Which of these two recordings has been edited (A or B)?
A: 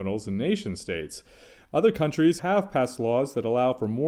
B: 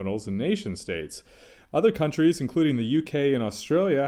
A